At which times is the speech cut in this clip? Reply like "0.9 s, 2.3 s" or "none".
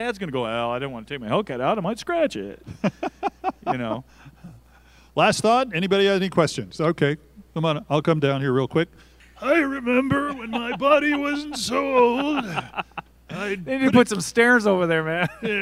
none